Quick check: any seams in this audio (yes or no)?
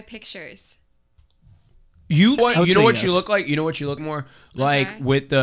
yes